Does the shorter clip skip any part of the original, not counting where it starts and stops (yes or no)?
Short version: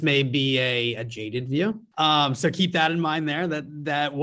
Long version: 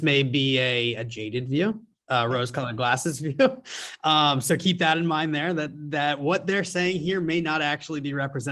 yes